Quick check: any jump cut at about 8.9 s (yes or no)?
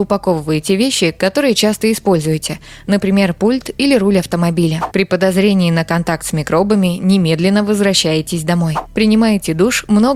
no